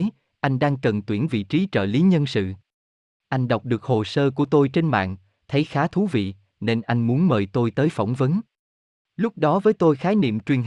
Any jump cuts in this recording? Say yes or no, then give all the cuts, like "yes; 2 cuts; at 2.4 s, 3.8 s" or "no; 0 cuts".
no; 0 cuts